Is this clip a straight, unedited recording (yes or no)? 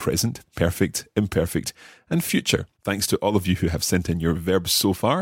no